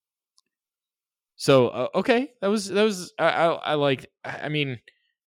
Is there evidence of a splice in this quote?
no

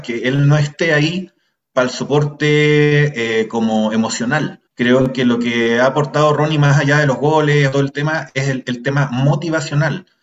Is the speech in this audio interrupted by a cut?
yes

